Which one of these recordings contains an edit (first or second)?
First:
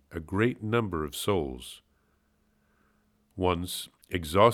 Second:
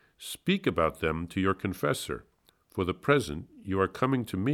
second